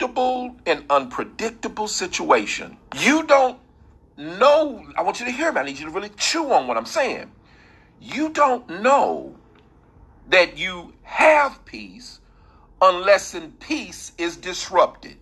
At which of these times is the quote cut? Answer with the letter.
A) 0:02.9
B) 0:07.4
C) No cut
A